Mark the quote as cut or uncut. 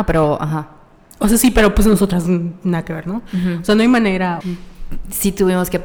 cut